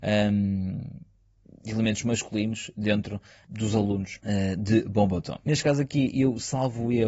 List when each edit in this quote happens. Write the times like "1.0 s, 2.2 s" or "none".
5.4 s